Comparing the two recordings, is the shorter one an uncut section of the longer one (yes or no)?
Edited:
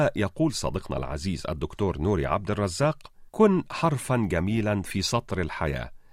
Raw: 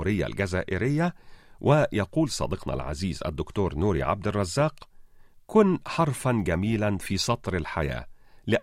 no